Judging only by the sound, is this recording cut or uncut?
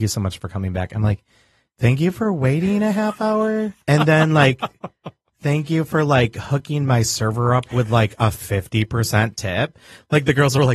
cut